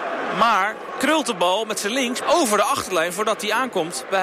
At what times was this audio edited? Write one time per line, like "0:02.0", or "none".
0:02.2